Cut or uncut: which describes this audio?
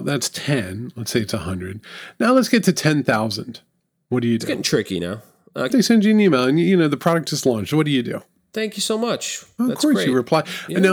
cut